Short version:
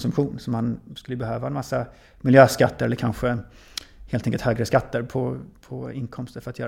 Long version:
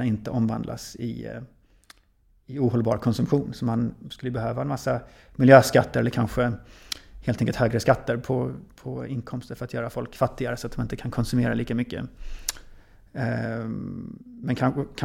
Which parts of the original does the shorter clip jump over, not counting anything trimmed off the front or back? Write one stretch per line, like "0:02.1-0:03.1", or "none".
none